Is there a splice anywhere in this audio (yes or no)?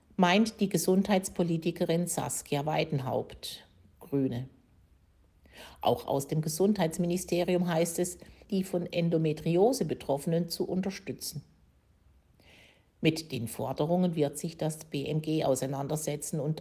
yes